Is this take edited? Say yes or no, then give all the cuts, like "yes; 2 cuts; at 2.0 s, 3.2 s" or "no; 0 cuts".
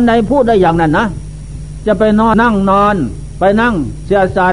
yes; 1 cut; at 2.3 s